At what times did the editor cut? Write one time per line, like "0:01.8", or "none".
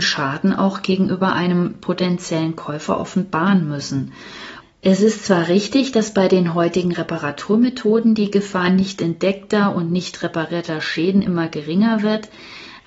0:04.6